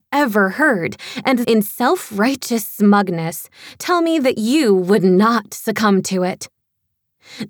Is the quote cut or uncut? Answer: cut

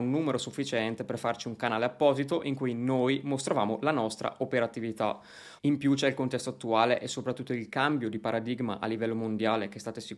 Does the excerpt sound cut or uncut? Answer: cut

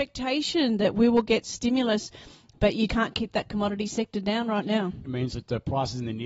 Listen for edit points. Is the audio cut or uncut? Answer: cut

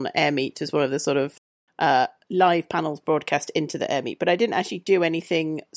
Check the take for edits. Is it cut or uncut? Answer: uncut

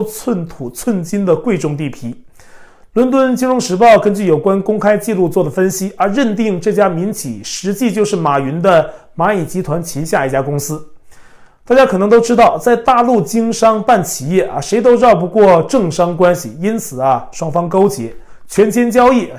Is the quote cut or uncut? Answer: uncut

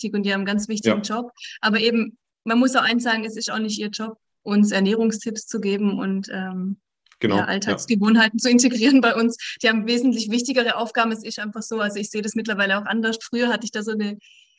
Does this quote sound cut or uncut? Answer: uncut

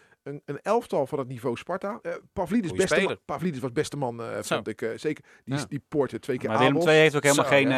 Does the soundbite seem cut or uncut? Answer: cut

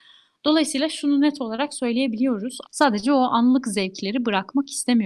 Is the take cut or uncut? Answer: cut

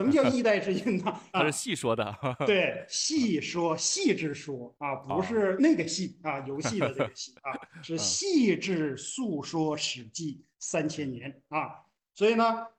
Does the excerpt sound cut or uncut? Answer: cut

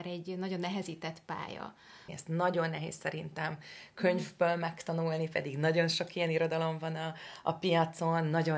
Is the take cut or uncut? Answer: cut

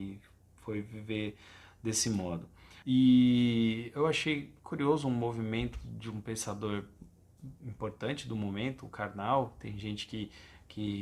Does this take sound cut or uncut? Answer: cut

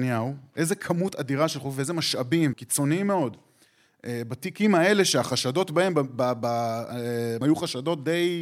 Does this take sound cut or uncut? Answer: cut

